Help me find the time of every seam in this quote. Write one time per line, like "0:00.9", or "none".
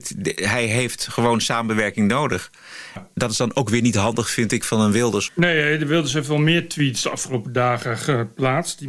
0:03.0
0:05.3